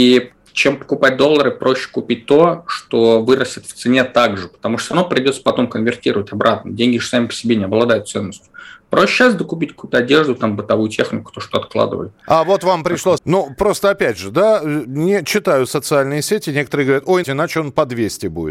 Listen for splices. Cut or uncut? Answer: cut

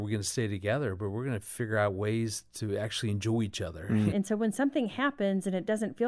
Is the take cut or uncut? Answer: cut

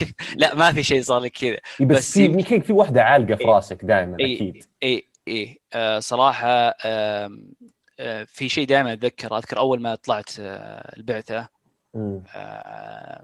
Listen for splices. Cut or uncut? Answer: cut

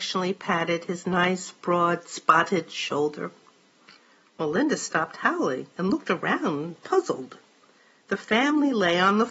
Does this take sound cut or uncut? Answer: uncut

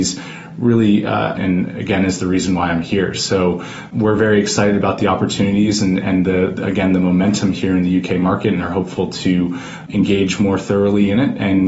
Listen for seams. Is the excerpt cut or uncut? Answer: cut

